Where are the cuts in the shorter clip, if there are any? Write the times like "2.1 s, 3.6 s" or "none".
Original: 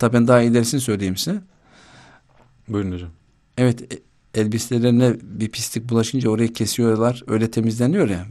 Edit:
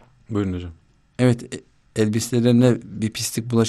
none